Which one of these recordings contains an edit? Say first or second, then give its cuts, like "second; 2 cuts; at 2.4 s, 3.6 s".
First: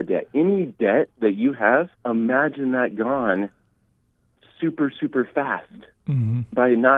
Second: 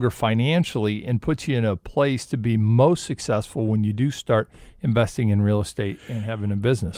first; 1 cut; at 2.0 s